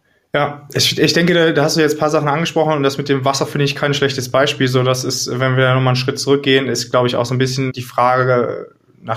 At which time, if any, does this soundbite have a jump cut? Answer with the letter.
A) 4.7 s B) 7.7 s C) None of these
B